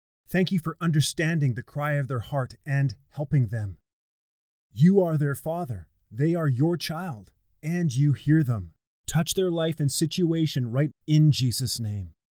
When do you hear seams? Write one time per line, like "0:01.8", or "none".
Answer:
0:09.0
0:10.9